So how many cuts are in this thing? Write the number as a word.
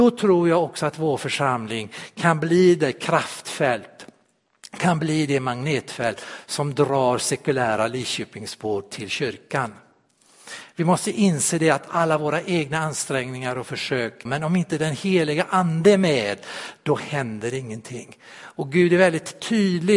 one